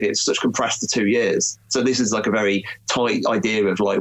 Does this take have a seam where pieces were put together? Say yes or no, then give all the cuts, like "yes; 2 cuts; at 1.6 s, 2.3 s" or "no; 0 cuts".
no; 0 cuts